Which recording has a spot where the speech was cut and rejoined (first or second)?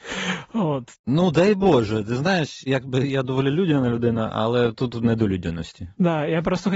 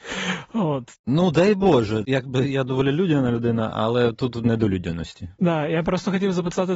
second